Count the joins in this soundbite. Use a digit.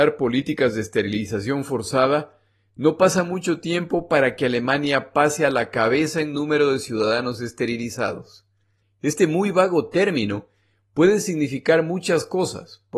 1